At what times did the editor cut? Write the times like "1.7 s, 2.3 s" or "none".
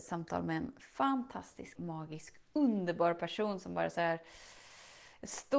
1.7 s